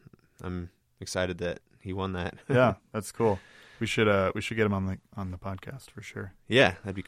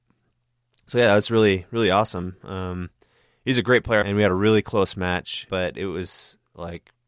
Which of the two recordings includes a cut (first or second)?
second